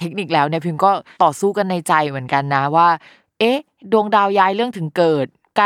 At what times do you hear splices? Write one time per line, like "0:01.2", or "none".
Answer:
none